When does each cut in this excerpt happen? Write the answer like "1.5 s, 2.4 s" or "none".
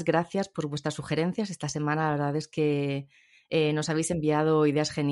none

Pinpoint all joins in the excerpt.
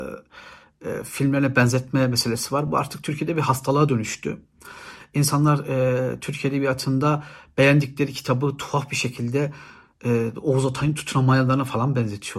none

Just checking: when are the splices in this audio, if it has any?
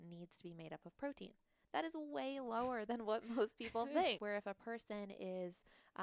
4.2 s

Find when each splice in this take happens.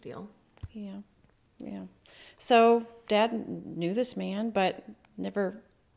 none

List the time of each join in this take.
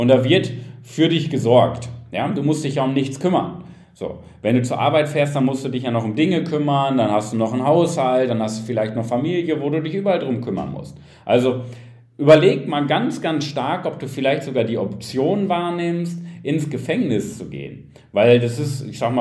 none

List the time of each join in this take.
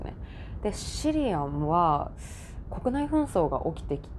2.6 s

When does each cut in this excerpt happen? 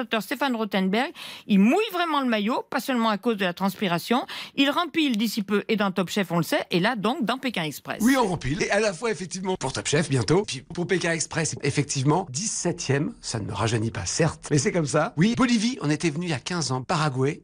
11.6 s

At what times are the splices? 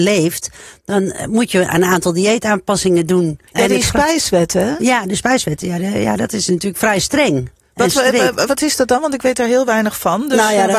3.5 s, 8.5 s

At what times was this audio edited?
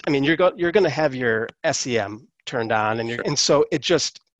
3.2 s

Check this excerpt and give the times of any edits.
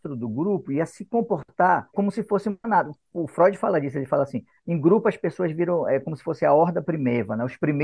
none

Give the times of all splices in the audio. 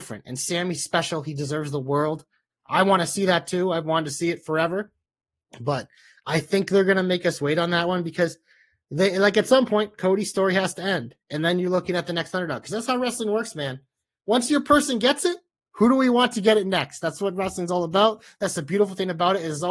15.7 s

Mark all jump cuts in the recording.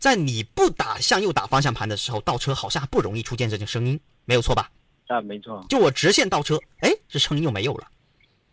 none

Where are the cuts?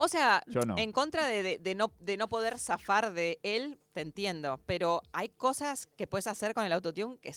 none

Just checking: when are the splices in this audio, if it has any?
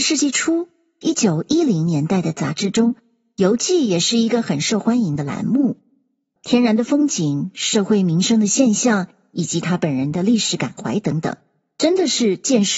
6.4 s

